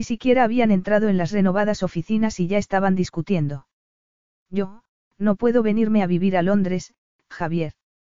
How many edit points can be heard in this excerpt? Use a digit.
1